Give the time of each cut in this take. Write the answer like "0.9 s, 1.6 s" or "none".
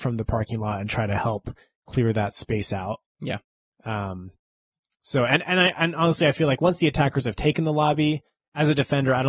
none